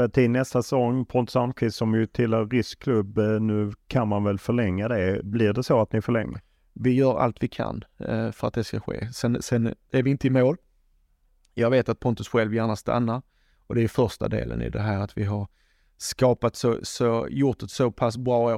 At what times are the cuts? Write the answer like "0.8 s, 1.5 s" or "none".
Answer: none